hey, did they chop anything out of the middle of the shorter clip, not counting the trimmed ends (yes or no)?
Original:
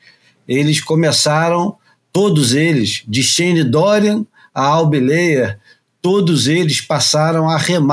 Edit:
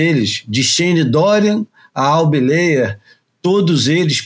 no